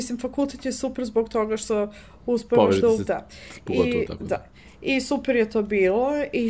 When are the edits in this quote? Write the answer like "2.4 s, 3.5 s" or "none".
3.1 s

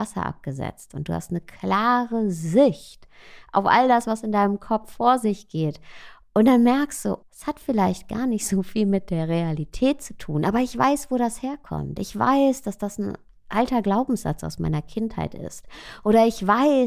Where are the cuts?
7.2 s

